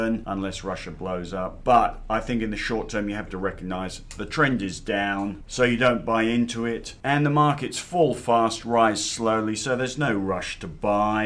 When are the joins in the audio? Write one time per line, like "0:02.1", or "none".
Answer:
none

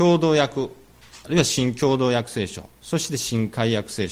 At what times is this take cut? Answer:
0:01.2
0:02.7

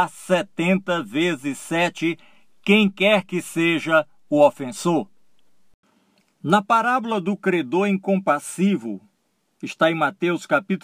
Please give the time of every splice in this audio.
none

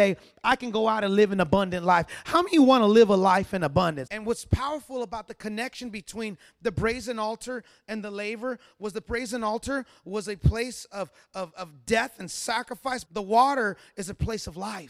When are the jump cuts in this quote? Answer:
0:04.1
0:13.0

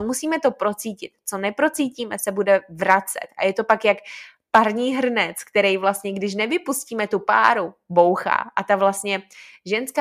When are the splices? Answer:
none

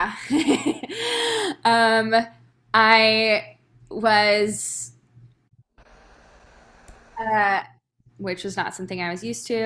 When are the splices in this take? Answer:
0:08.1

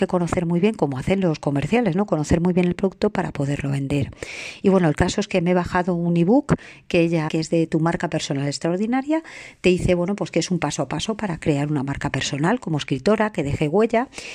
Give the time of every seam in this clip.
0:04.6
0:07.3

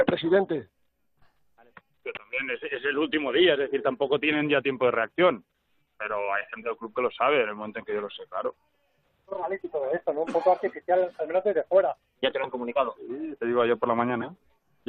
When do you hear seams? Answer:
0:12.1

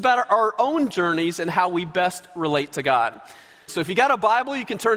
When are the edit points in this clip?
0:03.7

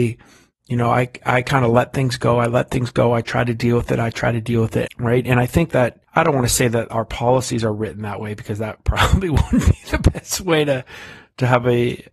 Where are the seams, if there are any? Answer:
0:04.9
0:06.0

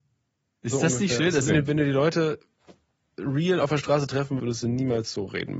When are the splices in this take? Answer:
0:01.5
0:04.4

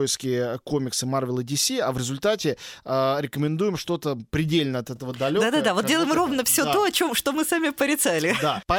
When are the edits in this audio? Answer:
none

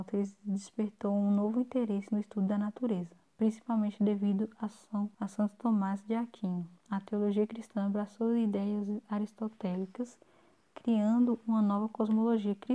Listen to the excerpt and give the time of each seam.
0:05.1

